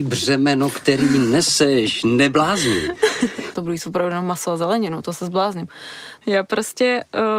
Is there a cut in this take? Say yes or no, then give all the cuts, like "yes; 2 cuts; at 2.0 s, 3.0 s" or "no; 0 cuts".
yes; 2 cuts; at 3.5 s, 6.2 s